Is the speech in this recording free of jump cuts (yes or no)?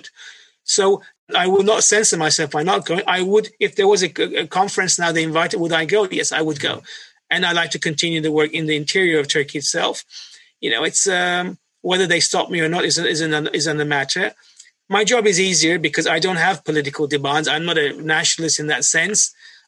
no